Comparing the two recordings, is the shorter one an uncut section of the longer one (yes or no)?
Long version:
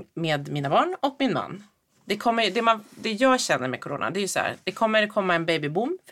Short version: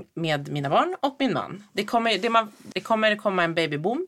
no